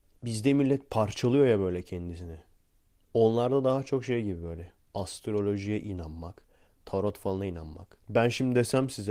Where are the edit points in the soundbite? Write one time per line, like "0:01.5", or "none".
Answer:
0:08.0